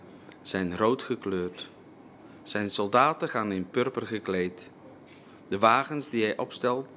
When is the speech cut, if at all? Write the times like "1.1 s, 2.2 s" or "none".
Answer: none